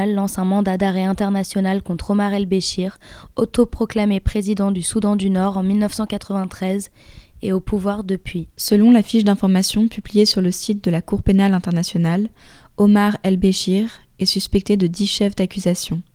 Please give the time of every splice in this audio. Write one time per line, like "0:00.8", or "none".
none